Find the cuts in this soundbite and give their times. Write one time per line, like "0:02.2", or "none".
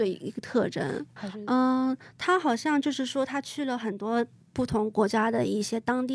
0:01.2